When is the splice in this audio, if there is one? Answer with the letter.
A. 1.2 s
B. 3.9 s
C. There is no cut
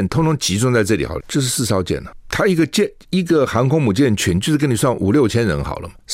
A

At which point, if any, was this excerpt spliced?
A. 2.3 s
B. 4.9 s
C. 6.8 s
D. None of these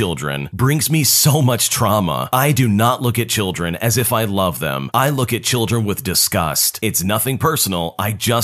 D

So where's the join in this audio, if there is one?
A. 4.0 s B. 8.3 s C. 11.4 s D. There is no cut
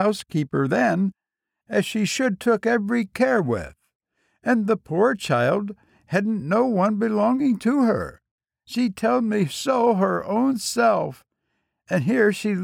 D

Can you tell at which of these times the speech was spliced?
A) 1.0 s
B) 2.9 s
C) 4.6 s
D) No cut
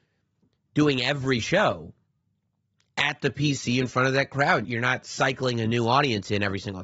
C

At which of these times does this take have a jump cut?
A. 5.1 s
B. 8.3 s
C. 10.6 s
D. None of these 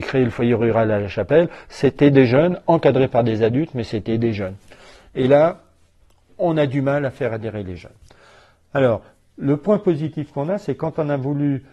D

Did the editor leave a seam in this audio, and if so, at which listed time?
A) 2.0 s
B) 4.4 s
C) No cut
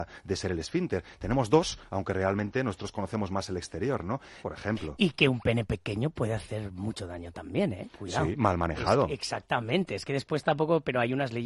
B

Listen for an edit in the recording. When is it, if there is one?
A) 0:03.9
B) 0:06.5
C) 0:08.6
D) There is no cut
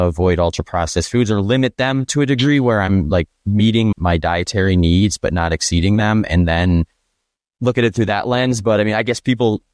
A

